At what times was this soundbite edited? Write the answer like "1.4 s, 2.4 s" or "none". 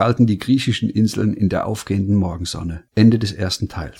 2.9 s